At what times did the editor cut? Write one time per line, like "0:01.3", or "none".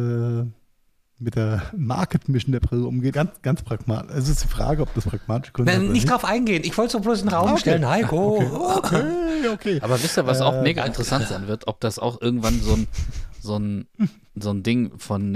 0:03.1